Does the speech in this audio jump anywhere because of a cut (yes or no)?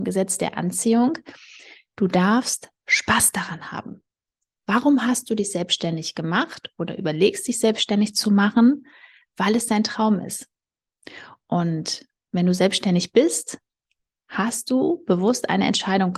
no